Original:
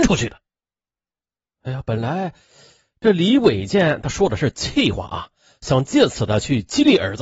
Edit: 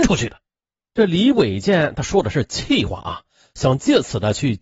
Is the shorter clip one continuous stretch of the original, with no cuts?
no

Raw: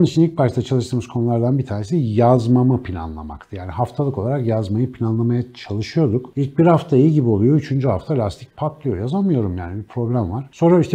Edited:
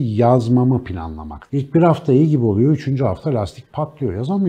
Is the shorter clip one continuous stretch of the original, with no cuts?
no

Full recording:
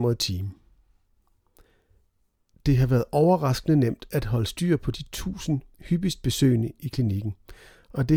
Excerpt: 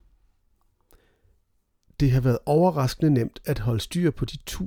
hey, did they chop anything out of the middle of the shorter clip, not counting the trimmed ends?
no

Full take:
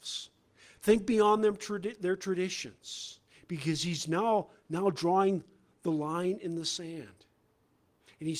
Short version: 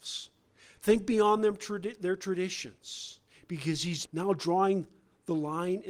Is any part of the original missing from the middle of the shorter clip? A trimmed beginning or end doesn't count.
yes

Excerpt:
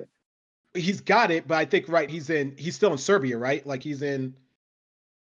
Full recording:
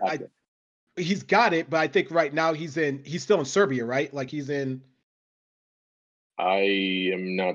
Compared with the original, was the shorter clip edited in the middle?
yes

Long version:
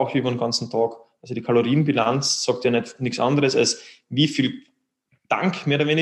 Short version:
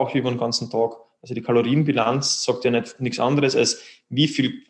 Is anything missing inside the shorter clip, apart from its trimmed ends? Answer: no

